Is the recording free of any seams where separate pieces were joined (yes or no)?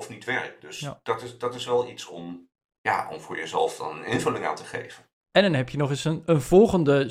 yes